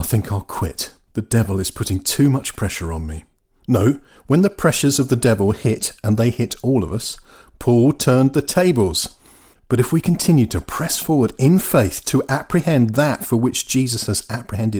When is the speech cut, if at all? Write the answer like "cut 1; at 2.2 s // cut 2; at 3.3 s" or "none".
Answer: cut 1; at 4.2 s // cut 2; at 9.6 s